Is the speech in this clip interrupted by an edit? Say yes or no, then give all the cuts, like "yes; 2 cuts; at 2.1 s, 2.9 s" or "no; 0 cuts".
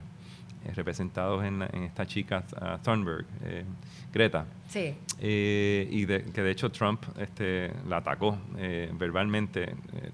no; 0 cuts